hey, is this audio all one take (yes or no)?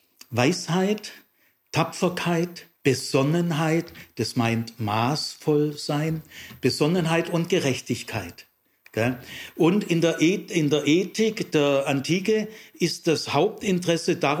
no